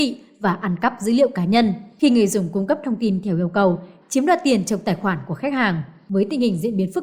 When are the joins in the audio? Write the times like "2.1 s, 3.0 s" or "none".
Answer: 4.0 s